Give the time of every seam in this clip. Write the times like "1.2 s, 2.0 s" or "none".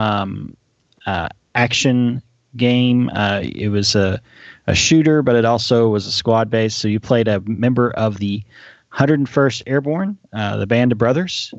none